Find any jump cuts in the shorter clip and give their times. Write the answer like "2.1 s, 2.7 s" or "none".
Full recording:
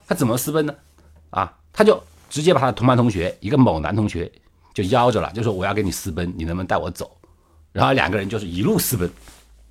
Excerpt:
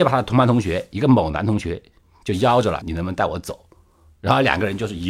2.8 s